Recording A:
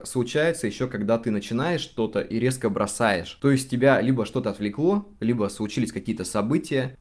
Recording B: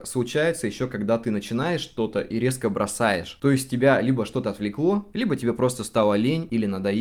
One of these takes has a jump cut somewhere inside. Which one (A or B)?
B